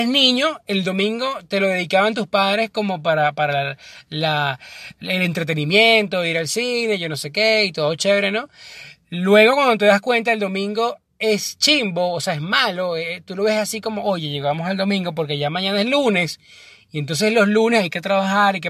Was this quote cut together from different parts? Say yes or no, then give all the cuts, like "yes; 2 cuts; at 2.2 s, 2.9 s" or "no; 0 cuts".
no; 0 cuts